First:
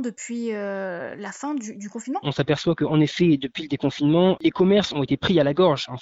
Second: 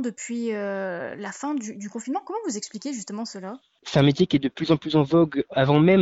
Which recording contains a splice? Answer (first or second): first